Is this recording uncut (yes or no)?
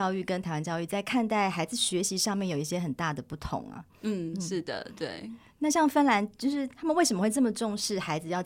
yes